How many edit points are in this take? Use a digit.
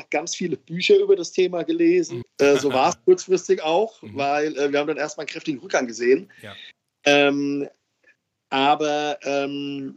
1